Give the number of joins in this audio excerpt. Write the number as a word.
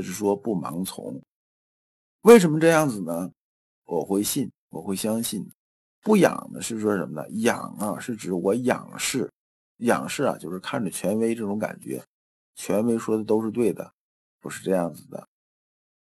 one